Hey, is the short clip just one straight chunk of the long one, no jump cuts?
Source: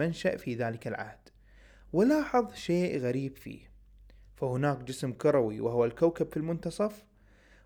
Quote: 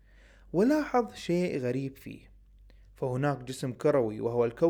yes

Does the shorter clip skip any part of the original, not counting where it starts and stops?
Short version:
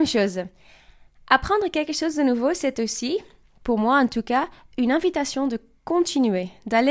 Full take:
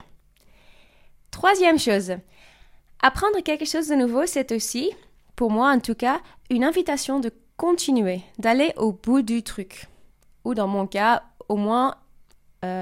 no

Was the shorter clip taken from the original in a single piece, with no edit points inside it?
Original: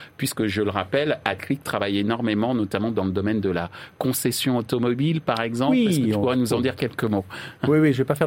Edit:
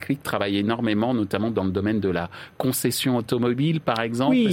yes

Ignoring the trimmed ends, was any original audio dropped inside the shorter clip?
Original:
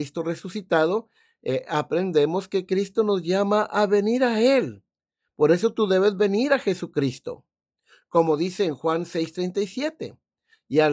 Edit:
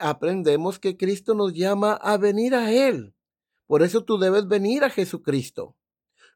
no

